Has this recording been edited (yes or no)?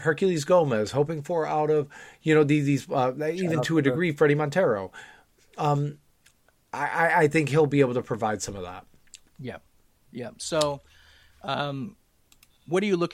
no